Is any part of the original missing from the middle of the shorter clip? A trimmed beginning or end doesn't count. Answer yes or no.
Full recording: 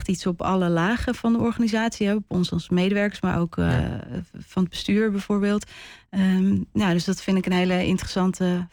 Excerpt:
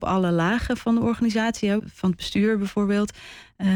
yes